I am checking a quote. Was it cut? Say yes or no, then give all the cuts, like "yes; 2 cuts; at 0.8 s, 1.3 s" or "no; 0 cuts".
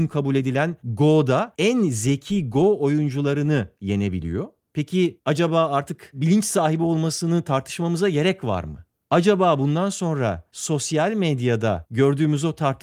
no; 0 cuts